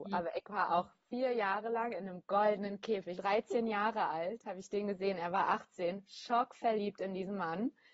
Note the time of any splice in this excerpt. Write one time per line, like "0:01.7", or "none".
0:03.2